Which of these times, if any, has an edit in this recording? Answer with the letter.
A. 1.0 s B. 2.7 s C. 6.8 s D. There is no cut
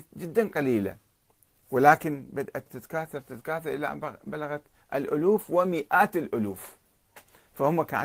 B